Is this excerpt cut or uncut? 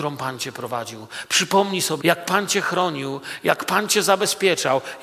cut